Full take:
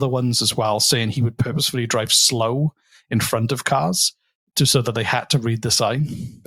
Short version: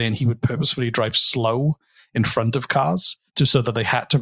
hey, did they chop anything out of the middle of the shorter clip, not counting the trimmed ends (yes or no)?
yes